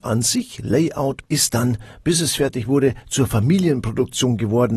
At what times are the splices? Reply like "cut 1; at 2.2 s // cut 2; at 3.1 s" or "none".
cut 1; at 1.3 s

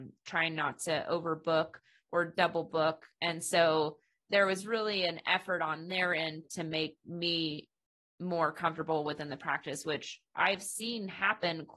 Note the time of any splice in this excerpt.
cut 1; at 6.4 s

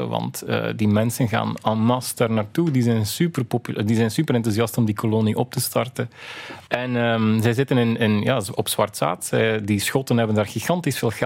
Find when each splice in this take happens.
cut 1; at 6.7 s

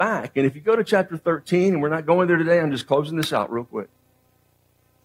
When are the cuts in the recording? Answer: none

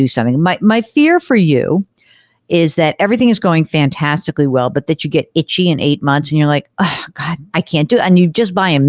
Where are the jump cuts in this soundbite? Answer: cut 1; at 7.5 s

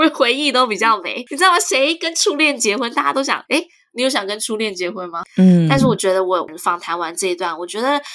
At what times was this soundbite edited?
cut 1; at 3.5 s // cut 2; at 5.2 s

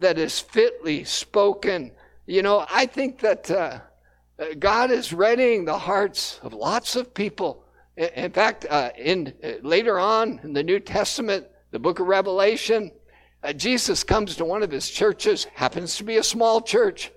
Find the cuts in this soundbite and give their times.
cut 1; at 2.6 s

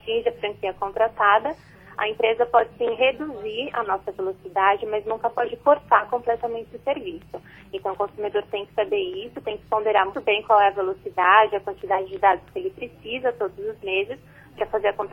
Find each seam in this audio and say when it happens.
cut 1; at 10.1 s

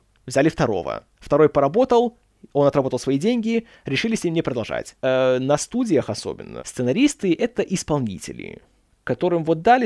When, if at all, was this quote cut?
cut 1; at 5.0 s // cut 2; at 6.6 s

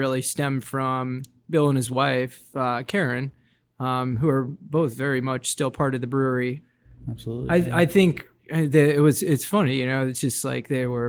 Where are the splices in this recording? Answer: none

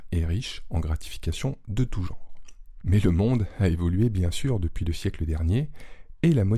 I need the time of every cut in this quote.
cut 1; at 2.8 s

